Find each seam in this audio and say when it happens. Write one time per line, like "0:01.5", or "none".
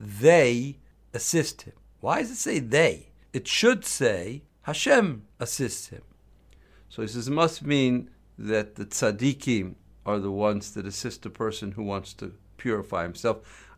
none